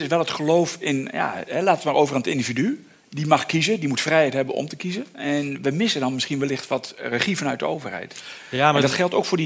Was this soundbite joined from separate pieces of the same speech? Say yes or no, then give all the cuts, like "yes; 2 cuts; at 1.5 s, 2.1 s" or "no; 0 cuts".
no; 0 cuts